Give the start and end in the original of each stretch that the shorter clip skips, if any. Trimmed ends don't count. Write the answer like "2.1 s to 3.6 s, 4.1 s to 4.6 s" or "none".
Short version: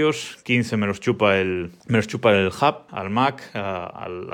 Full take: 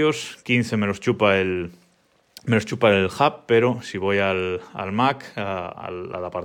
1.8 s to 2.4 s, 3.5 s to 4.7 s